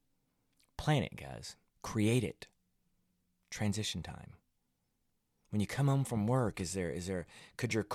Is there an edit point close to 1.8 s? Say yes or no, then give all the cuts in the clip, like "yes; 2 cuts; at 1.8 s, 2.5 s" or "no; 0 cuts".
yes; 1 cut; at 1.8 s